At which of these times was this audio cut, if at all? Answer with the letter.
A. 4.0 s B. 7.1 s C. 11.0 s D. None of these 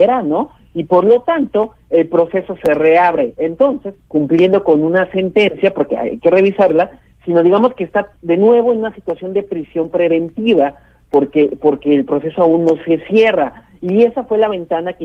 A